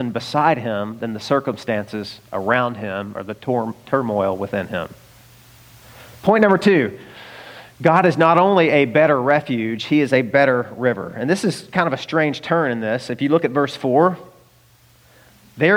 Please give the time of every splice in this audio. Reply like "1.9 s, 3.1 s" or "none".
none